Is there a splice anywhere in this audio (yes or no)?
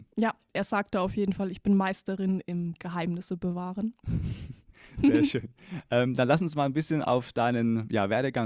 no